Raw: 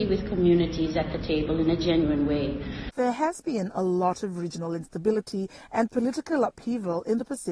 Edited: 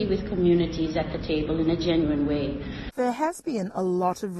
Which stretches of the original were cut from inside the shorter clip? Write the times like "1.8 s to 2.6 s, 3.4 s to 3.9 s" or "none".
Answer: none